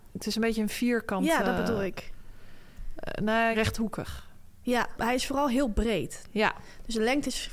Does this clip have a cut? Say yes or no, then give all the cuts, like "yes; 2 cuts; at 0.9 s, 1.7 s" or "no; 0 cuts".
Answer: yes; 1 cut; at 3.5 s